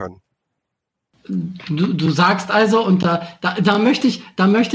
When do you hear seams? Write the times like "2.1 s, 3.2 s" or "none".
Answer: none

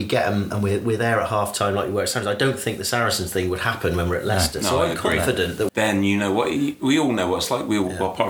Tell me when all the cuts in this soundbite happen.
5.7 s

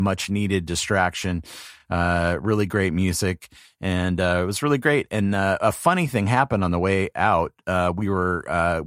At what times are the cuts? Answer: none

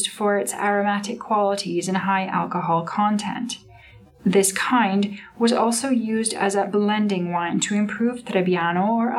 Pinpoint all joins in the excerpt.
none

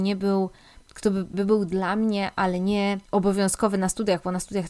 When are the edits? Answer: 1.3 s, 3.0 s

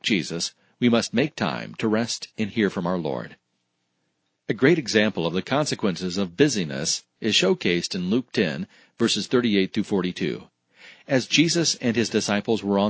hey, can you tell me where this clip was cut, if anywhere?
none

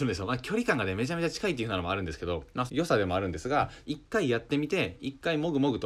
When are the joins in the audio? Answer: 2.7 s, 3.8 s

